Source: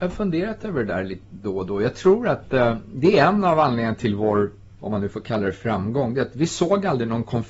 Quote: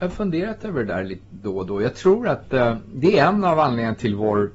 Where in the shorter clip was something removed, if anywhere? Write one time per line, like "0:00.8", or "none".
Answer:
none

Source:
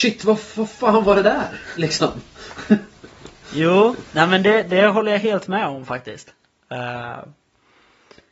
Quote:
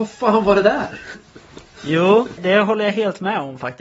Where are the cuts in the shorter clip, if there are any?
0:01.1
0:02.4

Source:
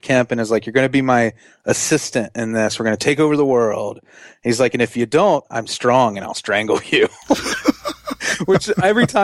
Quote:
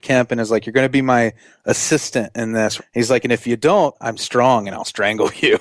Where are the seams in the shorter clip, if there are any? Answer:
0:02.8

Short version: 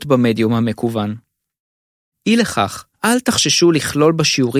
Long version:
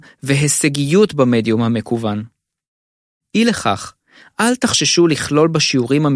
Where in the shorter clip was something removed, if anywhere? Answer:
0:02.9

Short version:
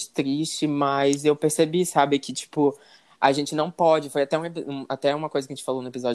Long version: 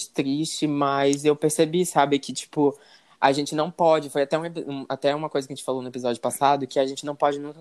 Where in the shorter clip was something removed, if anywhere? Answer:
none

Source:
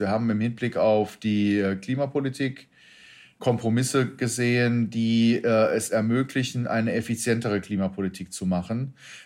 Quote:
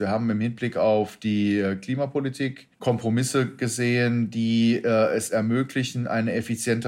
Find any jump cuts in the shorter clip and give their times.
0:02.7

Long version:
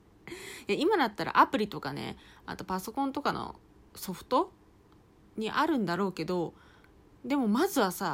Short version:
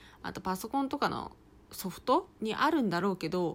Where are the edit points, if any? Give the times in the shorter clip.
0:02.3

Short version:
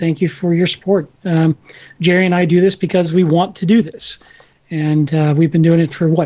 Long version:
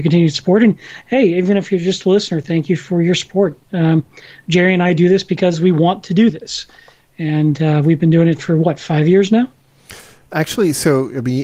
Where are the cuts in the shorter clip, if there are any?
none

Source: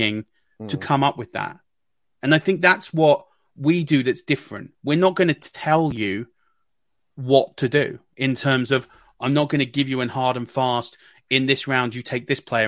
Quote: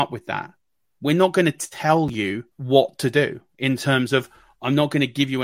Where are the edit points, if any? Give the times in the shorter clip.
0:01.0
0:02.5

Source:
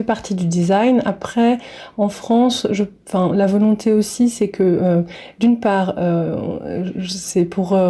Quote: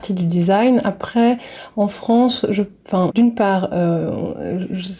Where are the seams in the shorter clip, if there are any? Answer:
0:03.1

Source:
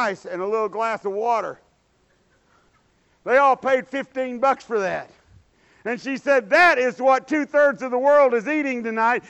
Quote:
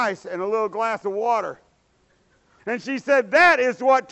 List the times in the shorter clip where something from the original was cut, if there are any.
0:02.6

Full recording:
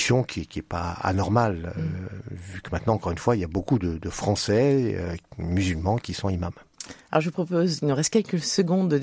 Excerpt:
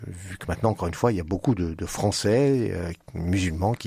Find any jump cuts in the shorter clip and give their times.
none

